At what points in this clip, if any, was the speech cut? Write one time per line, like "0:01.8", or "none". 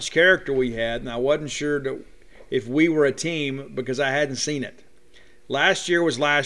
none